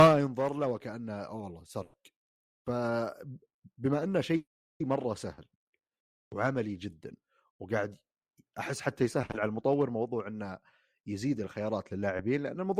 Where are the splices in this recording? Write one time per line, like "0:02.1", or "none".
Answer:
none